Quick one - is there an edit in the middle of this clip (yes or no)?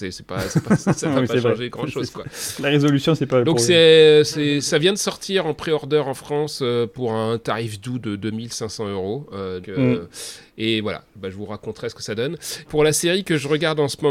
yes